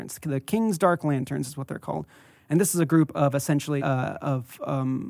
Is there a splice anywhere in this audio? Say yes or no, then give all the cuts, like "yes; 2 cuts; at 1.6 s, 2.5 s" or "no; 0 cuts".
yes; 1 cut; at 3.8 s